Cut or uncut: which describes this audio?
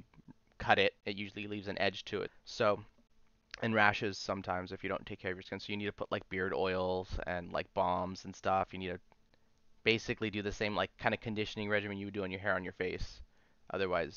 cut